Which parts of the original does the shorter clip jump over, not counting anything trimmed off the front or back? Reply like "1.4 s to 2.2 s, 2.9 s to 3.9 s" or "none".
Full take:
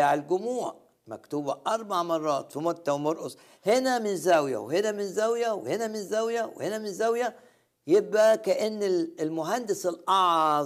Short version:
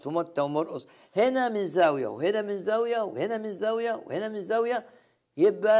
none

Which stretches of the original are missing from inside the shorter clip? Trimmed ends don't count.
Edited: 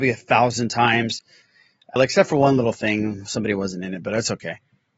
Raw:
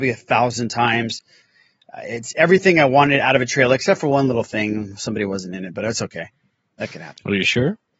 2.0 s to 3.7 s

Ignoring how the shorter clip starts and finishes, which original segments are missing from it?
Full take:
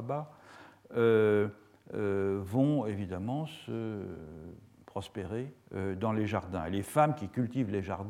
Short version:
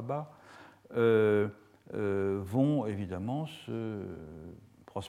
none

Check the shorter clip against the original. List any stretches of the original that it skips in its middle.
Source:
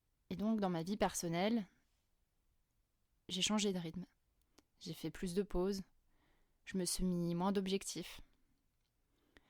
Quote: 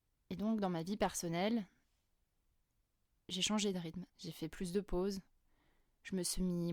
4.1 s to 4.7 s

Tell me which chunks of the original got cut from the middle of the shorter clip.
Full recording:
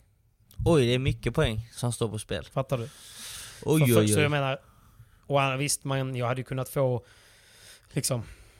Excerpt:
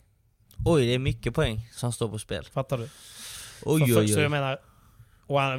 none

